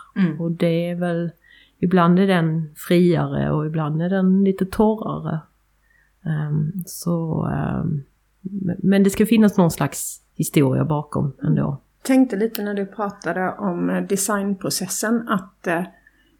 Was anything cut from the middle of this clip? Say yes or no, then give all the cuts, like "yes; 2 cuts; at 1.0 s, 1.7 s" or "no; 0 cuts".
yes; 2 cuts; at 10.3 s, 12.0 s